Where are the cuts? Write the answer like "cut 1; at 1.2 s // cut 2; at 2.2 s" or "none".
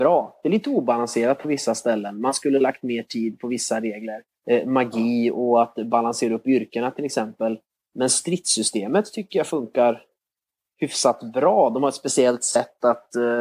none